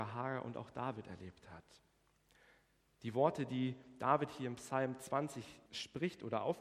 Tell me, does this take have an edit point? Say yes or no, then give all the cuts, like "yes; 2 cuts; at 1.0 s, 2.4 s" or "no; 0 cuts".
yes; 1 cut; at 5.7 s